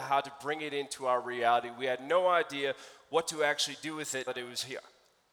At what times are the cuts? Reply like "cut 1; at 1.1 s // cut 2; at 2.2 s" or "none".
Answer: cut 1; at 4.3 s